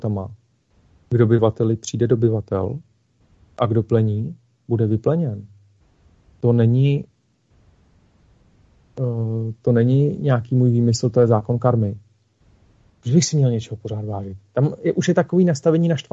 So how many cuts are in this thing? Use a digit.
1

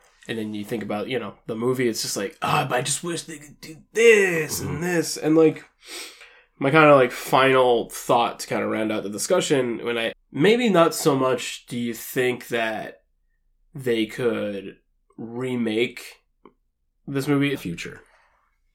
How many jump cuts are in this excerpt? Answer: 2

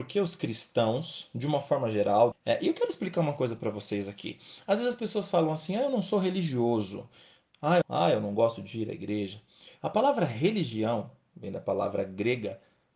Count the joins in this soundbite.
3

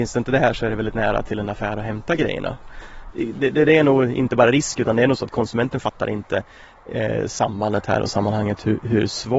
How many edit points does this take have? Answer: 0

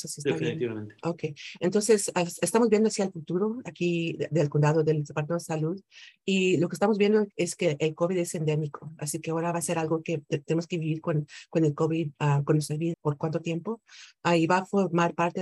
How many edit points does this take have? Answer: 1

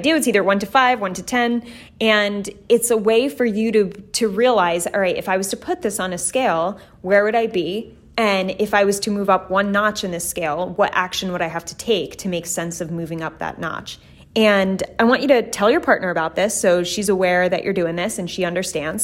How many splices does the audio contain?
1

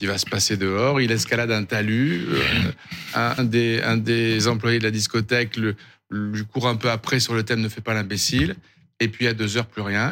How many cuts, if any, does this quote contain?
1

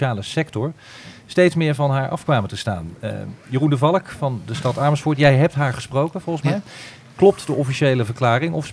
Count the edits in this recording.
0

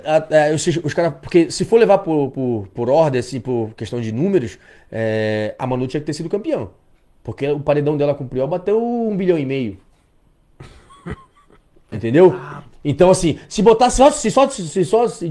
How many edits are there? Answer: 0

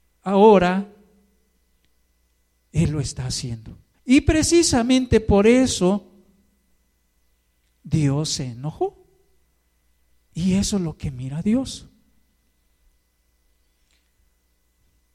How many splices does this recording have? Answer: 2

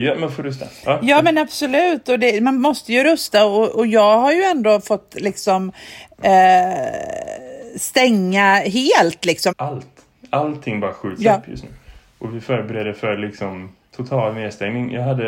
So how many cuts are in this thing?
1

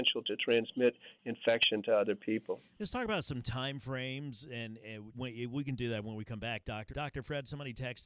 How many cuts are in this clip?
2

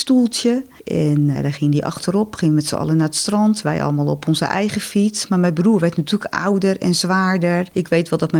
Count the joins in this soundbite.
1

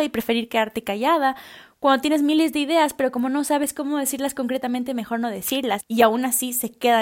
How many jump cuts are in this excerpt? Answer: 1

